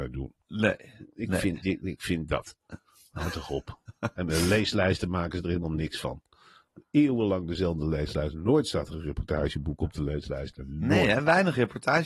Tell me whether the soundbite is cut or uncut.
uncut